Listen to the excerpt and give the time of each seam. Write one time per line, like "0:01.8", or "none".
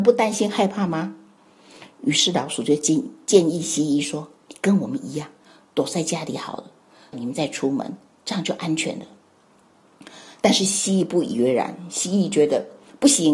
0:07.1